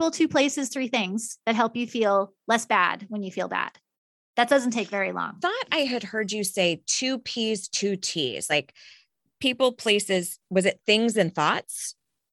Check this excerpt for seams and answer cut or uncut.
uncut